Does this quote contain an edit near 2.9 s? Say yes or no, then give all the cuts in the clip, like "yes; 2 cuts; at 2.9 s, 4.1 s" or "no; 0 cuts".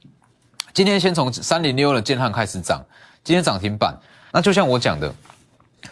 no; 1 cut; at 4.3 s